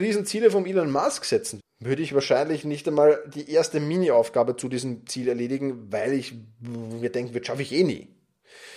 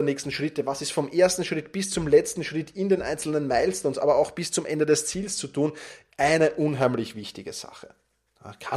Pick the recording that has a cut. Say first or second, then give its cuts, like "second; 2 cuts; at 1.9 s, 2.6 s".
first; 1 cut; at 1.6 s